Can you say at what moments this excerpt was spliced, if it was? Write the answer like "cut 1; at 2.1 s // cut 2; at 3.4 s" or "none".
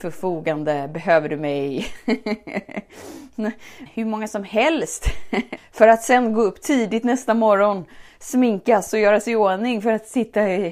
cut 1; at 3.9 s // cut 2; at 5.6 s